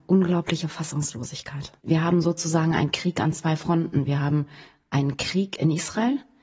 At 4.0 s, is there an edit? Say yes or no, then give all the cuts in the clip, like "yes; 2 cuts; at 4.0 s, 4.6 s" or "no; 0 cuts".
no; 1 cut; at 1.8 s